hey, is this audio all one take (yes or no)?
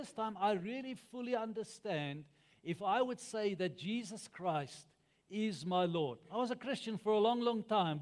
yes